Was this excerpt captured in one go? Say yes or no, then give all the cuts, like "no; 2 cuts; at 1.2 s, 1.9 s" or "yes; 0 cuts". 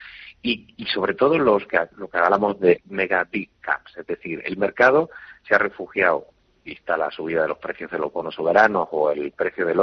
no; 1 cut; at 2.8 s